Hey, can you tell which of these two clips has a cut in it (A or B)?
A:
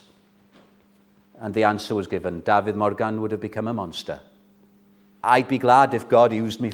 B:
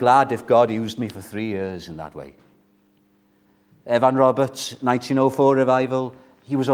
A